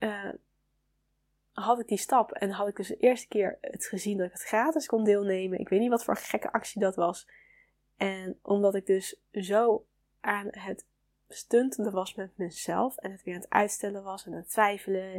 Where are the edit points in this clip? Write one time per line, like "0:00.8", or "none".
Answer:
none